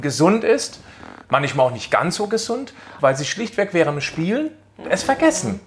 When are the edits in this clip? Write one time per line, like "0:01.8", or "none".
0:03.0